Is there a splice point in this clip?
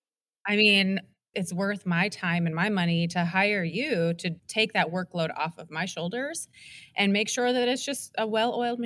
yes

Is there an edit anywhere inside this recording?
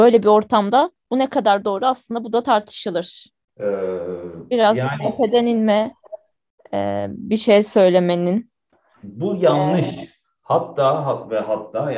no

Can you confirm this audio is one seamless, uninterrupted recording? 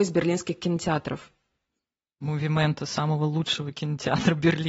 yes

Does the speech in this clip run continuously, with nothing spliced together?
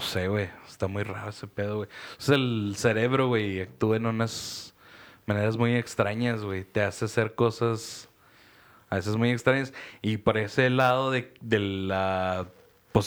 yes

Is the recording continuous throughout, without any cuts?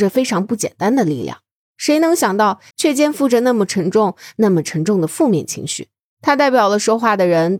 no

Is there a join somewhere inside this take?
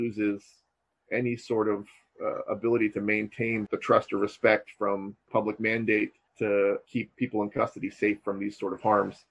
no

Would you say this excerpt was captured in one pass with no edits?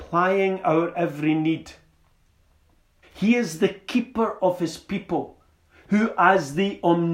no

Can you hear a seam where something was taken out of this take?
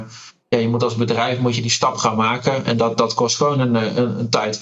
no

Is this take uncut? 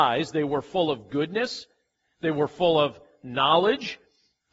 yes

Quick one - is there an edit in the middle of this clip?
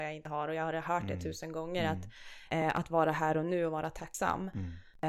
no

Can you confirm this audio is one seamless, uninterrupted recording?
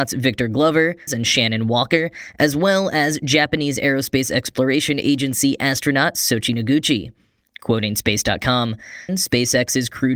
no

